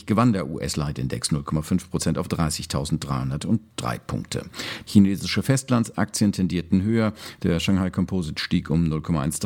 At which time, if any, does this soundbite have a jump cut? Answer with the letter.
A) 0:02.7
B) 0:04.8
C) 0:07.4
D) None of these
B